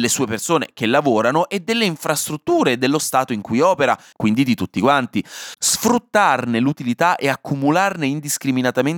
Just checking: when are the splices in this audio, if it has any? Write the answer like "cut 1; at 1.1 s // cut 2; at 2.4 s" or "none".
cut 1; at 4.1 s